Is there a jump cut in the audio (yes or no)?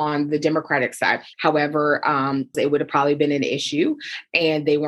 yes